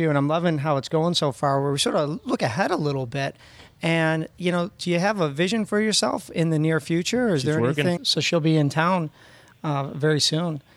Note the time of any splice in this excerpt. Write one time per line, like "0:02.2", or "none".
0:08.0